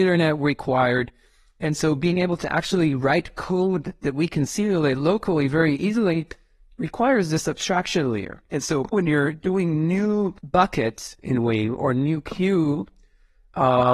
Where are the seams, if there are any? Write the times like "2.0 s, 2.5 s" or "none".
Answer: 8.9 s, 10.4 s